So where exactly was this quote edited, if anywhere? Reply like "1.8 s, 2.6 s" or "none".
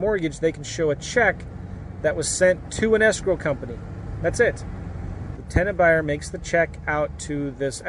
5.4 s